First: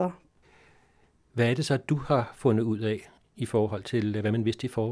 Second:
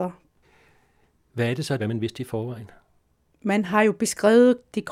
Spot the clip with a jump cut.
second; 1 cut; at 1.8 s

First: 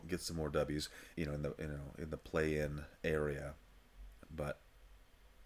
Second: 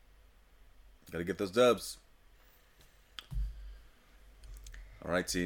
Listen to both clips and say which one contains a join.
first; 2 cuts; at 1.1 s, 4.2 s

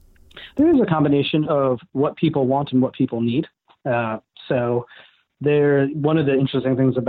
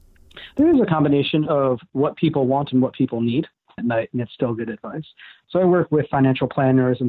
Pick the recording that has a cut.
second; 1 cut; at 3.8 s

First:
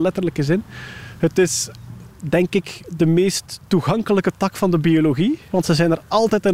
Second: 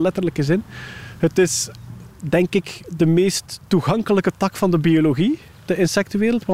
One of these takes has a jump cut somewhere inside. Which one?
first; 1 cut; at 5.5 s

